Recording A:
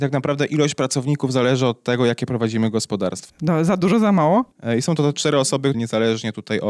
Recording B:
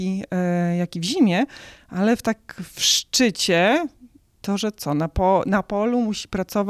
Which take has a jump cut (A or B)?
A